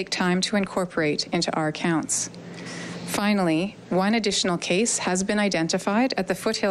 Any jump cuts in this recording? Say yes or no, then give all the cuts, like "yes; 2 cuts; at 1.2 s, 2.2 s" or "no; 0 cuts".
no; 0 cuts